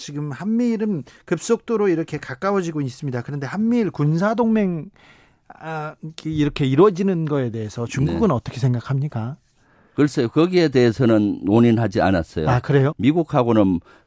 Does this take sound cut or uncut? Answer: cut